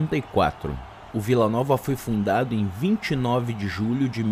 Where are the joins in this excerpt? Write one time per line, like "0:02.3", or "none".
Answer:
0:01.1